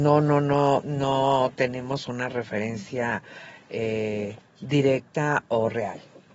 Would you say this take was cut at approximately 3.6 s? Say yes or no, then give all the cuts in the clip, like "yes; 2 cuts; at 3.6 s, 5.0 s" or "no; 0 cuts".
no; 0 cuts